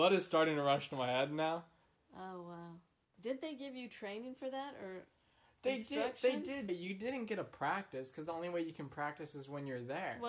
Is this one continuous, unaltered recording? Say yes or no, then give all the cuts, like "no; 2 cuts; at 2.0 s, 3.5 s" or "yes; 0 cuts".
no; 2 cuts; at 3.0 s, 6.7 s